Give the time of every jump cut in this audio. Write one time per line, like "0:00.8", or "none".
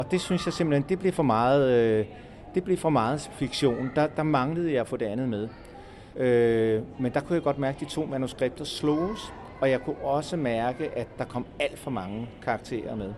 0:06.1